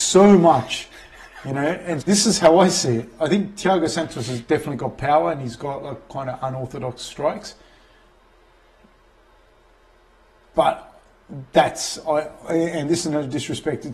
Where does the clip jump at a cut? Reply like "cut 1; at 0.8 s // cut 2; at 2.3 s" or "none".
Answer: cut 1; at 2.0 s